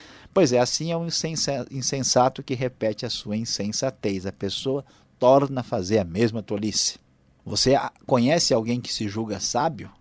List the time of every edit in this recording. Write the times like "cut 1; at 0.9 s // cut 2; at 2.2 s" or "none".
none